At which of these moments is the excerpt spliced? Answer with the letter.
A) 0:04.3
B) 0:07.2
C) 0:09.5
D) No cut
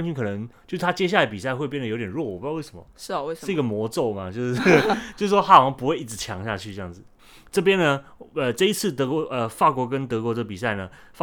B